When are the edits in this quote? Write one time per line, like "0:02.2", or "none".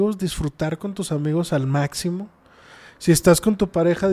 none